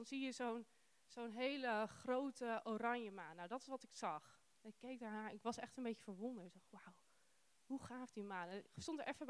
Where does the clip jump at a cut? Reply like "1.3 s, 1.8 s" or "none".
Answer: none